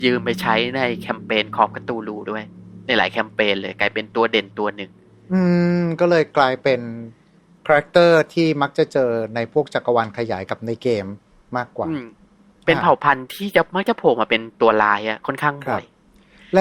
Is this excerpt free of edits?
yes; 0 cuts

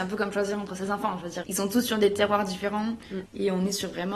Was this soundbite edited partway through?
yes; 2 cuts; at 1.4 s, 3.3 s

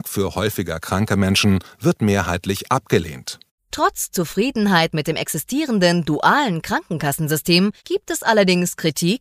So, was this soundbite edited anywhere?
yes; 2 cuts; at 3.6 s, 7.8 s

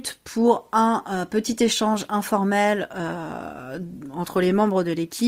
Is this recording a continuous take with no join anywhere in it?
yes; 0 cuts

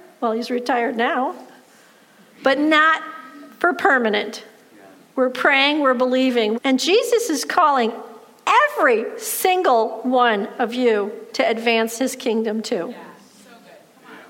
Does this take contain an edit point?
yes; 1 cut; at 6.5 s

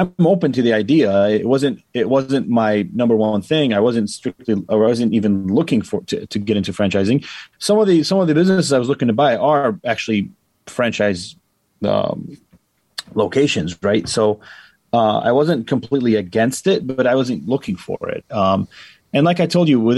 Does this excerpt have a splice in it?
no; 0 cuts

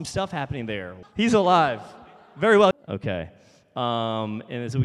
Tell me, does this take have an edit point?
yes; 2 cuts; at 1.0 s, 2.7 s

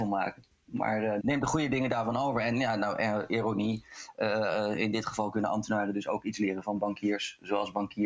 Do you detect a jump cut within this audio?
no; 0 cuts

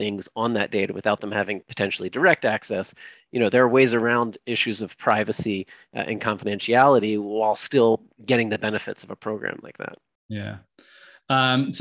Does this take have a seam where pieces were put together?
no; 0 cuts

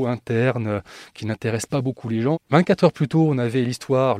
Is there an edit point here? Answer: yes; 1 cut; at 2.3 s

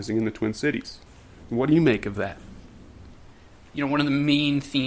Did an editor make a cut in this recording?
no; 0 cuts

